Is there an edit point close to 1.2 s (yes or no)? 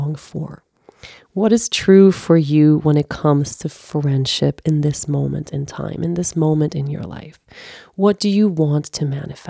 no